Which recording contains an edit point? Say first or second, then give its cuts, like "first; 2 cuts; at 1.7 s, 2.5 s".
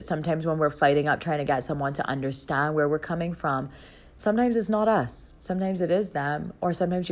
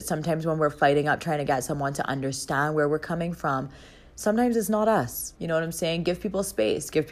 second; 1 cut; at 5.3 s